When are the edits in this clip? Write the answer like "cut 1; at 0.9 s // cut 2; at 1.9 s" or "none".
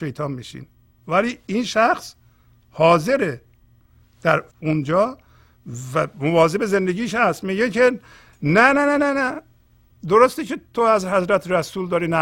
cut 1; at 4.5 s